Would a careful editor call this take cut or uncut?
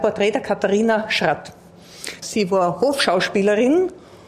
cut